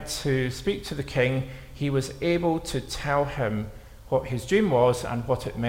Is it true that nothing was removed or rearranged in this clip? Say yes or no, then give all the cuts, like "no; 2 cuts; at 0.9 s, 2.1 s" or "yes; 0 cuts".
yes; 0 cuts